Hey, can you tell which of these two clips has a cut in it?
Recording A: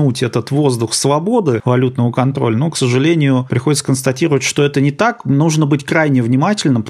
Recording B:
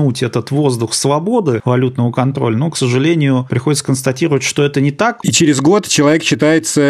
B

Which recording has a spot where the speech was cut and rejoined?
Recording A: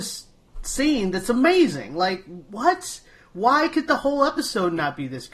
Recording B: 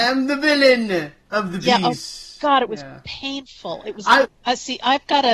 B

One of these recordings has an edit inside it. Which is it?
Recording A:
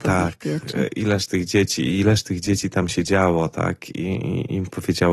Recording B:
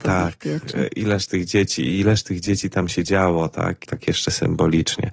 B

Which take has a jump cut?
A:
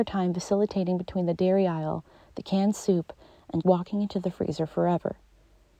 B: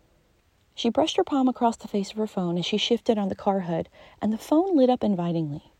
A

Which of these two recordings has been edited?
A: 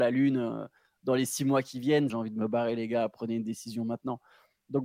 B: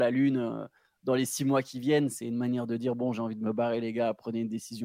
A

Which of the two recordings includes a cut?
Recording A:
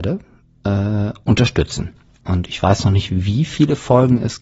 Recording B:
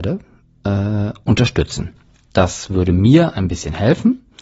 A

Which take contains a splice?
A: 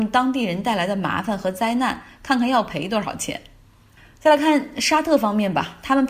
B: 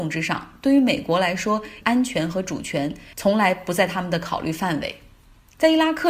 B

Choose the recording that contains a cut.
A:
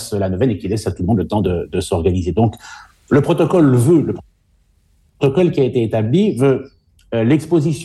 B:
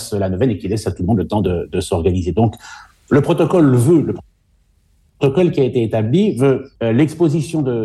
B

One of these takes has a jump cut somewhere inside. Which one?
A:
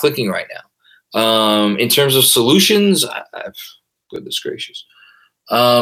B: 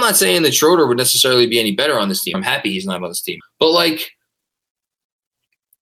B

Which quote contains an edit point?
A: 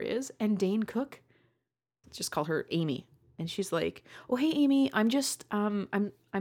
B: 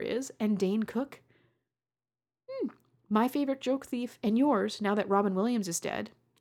A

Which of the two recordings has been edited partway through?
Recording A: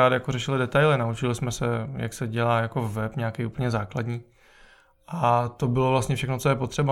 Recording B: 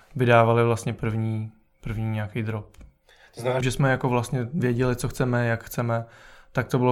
B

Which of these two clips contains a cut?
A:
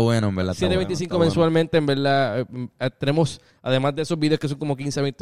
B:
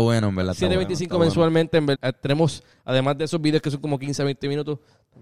B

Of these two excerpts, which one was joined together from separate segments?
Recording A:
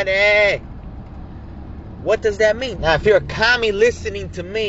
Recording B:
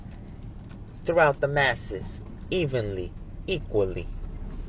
A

